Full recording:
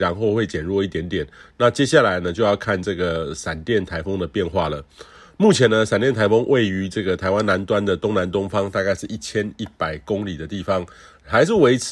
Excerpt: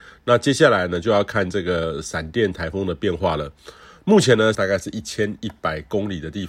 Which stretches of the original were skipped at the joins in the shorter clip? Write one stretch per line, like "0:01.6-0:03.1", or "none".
0:05.9-0:08.7